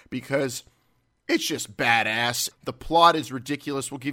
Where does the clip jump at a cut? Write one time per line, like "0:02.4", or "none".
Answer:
0:02.5